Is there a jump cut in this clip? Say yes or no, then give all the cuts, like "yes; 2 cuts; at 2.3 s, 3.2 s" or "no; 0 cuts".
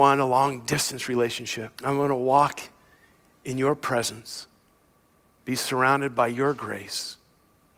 yes; 2 cuts; at 1.7 s, 5.3 s